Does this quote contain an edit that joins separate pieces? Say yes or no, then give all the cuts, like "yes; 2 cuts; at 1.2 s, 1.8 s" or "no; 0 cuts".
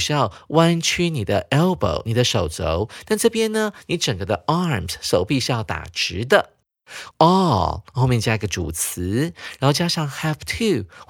yes; 1 cut; at 7.1 s